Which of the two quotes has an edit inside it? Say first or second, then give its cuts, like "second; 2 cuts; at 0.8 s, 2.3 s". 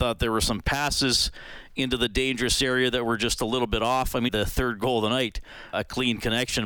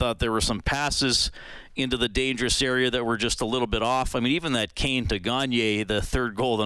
first; 2 cuts; at 4.3 s, 5.7 s